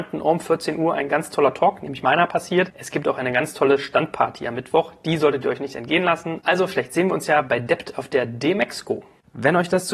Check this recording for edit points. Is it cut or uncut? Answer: uncut